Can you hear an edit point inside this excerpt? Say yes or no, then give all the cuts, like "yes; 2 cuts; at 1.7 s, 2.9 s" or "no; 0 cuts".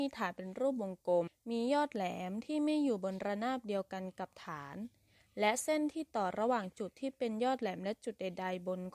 yes; 1 cut; at 1.3 s